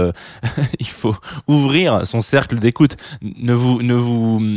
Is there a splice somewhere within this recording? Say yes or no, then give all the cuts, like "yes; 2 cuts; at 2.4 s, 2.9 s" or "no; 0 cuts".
no; 0 cuts